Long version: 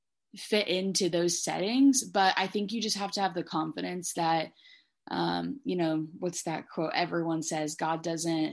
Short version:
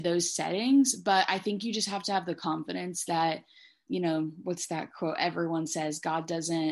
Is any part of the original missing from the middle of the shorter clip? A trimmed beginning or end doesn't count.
yes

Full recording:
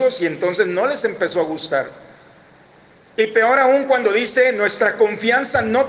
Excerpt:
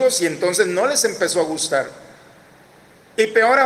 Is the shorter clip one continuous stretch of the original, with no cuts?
yes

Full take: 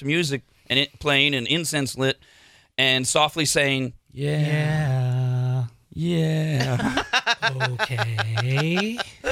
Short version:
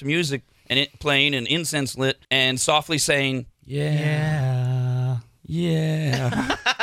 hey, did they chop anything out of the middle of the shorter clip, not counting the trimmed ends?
yes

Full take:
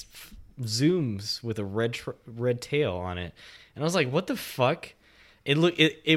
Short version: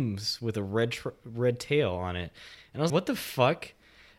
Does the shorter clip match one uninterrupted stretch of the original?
no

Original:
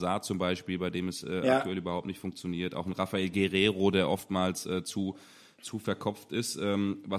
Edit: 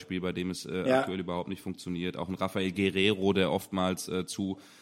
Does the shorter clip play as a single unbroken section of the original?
yes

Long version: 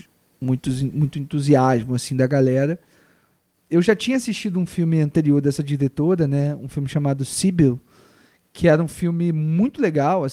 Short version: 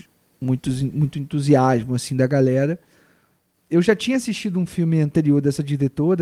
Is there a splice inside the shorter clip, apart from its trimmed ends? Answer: no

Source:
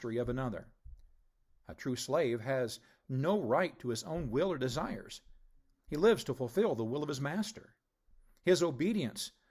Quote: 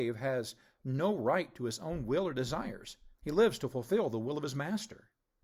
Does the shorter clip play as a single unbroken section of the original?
no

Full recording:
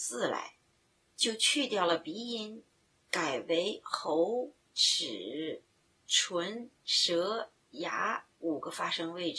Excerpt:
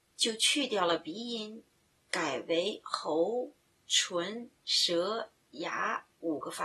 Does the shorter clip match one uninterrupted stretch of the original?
no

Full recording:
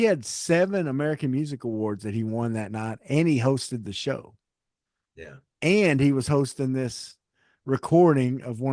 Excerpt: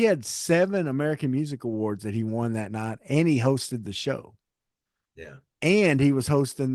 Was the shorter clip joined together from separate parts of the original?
no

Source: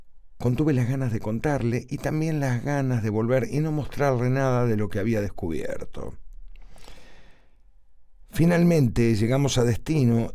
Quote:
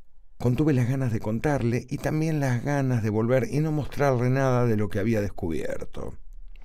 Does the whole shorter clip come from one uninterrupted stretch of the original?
yes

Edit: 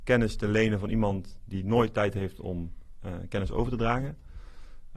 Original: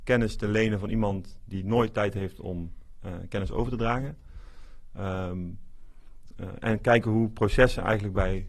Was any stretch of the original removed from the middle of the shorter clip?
no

